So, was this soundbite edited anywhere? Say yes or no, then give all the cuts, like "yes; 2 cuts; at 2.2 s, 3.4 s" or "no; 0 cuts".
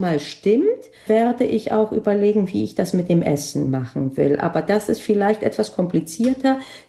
yes; 1 cut; at 1.1 s